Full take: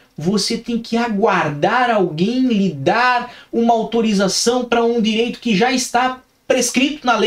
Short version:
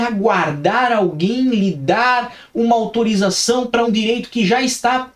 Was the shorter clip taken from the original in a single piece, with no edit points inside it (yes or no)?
no